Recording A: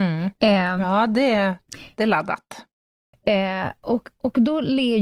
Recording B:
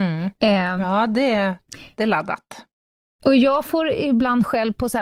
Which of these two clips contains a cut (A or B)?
A